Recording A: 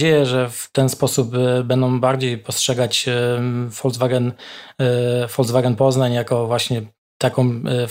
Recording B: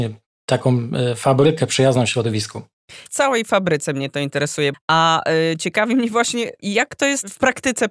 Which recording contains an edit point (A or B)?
B